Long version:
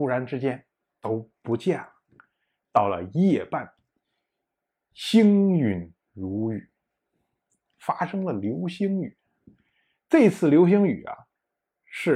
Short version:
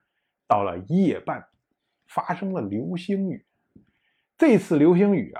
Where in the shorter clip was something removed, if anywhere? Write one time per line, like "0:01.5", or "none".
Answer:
0:02.0